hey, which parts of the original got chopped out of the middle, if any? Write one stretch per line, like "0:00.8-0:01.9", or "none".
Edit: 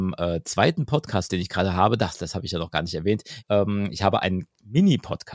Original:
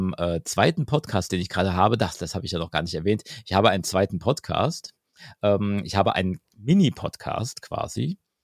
0:03.4-0:05.4